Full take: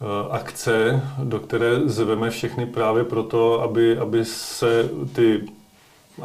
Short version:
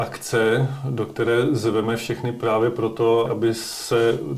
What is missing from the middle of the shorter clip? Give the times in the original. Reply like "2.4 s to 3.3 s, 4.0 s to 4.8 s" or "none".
3.6 s to 4.0 s